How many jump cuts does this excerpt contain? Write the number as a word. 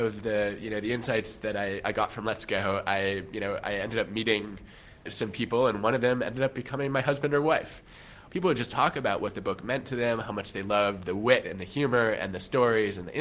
one